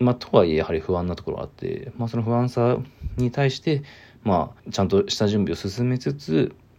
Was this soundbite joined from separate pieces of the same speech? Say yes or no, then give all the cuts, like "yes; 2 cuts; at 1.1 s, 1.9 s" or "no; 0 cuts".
yes; 1 cut; at 4.6 s